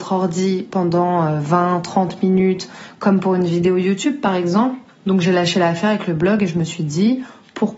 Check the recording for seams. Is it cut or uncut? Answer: cut